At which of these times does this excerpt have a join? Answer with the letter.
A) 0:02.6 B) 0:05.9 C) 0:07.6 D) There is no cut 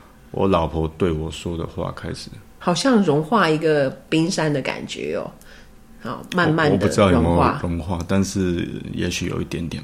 A